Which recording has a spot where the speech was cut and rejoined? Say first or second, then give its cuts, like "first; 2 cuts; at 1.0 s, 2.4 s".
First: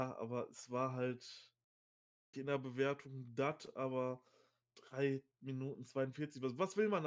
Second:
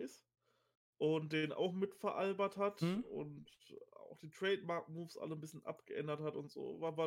first; 1 cut; at 2.3 s